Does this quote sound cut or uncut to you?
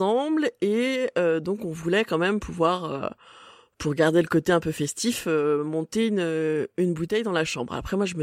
uncut